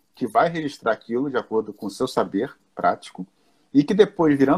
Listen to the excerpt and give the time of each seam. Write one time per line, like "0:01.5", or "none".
none